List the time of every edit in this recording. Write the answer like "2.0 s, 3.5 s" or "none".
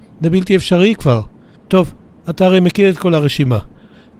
1.6 s